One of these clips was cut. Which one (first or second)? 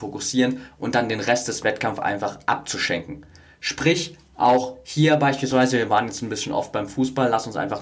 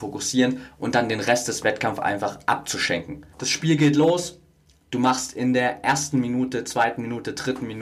second